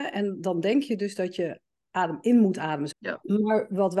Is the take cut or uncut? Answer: cut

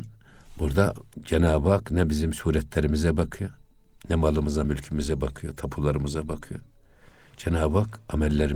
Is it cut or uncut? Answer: uncut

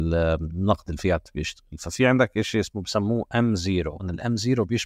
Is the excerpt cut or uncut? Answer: uncut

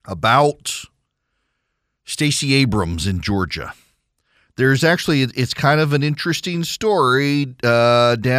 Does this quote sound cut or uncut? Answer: uncut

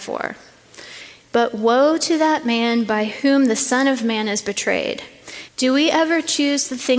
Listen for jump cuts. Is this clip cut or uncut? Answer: cut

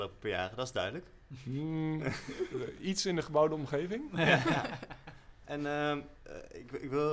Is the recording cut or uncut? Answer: uncut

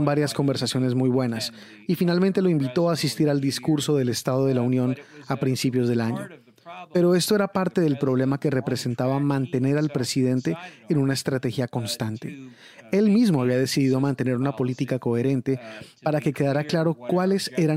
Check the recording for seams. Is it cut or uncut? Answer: uncut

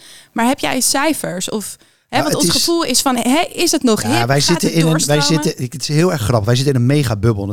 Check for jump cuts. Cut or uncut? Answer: uncut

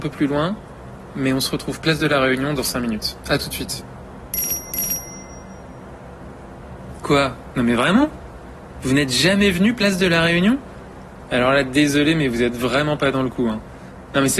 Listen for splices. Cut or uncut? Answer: uncut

